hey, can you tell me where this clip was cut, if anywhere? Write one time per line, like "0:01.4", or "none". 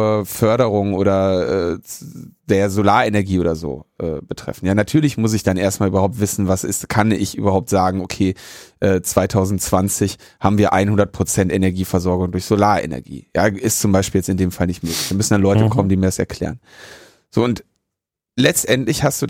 none